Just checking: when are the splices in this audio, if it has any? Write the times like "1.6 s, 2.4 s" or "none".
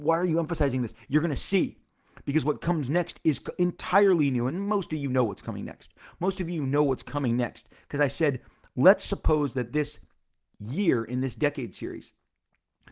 none